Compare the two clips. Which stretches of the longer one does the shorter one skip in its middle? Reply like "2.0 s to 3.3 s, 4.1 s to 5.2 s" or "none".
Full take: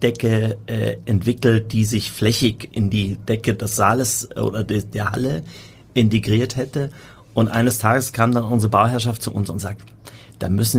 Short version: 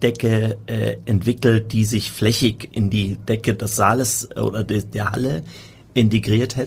none

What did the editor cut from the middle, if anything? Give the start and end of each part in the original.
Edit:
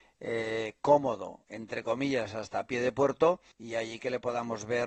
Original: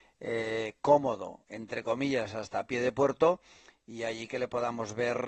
3.5 s to 3.8 s

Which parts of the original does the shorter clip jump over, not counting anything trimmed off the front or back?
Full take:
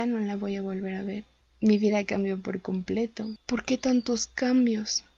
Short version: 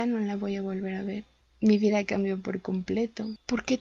none

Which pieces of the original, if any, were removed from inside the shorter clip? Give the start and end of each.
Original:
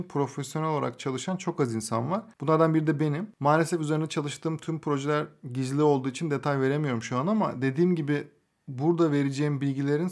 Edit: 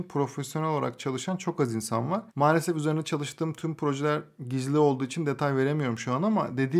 2.3 s to 3.3 s

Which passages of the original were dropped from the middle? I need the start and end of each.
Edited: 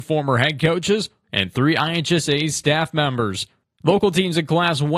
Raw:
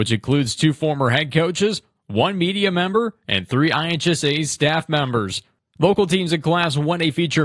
2.0 s to 3.2 s

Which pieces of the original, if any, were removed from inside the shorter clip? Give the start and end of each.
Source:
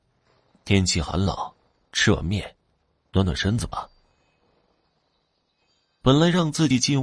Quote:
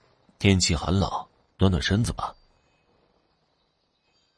1.8 s to 3.1 s

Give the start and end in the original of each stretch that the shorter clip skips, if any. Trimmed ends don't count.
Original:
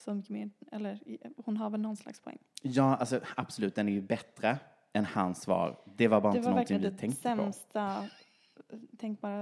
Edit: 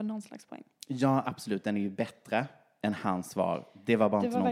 3.0 s to 3.3 s

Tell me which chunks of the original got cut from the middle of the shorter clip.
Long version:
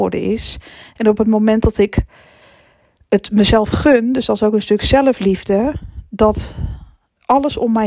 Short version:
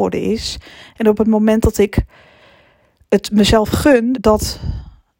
4.1 s to 6.1 s

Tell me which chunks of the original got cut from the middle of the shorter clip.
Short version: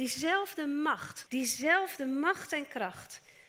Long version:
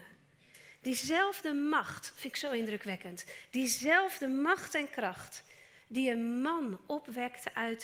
2.1 s to 3.5 s

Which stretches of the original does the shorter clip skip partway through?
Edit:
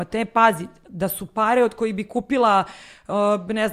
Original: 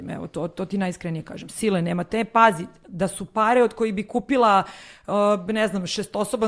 none

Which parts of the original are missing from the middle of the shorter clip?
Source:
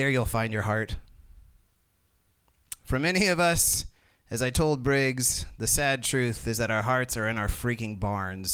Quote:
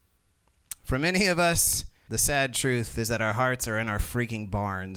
4.1 s to 5.6 s

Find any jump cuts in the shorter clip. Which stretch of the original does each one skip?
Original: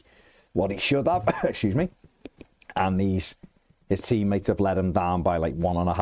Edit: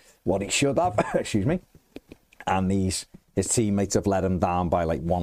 3.5 s to 3.8 s

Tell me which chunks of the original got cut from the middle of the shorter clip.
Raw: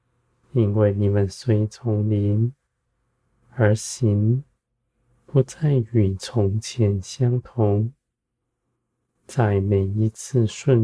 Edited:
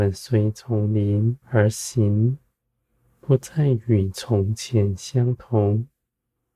2.6 s to 3.5 s

